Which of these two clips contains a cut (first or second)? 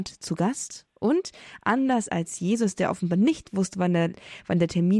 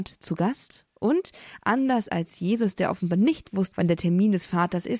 second